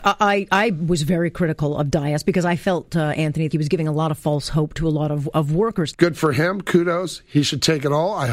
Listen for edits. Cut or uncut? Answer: cut